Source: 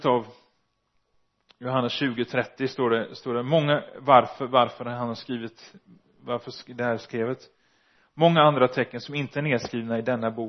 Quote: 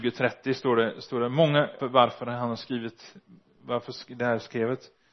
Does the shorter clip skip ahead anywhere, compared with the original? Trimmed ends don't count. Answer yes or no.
yes